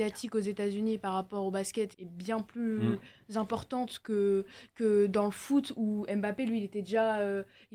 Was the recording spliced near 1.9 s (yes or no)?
yes